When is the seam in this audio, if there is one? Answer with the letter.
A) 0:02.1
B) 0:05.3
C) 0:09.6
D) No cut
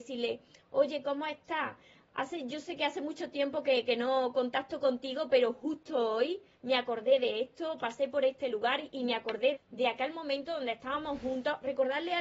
C